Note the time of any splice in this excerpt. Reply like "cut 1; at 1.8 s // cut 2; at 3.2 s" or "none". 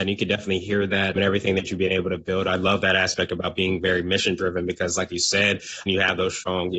cut 1; at 5.9 s